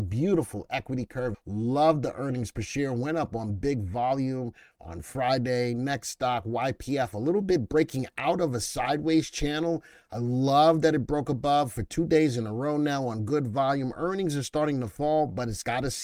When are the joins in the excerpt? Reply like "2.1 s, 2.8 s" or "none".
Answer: 1.3 s